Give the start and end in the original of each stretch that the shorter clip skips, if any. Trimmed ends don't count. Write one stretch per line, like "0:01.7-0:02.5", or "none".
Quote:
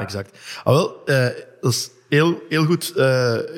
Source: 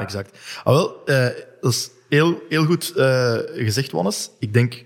none